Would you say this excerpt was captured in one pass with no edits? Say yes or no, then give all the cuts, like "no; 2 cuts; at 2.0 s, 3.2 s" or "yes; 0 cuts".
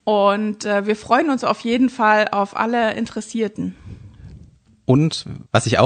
yes; 0 cuts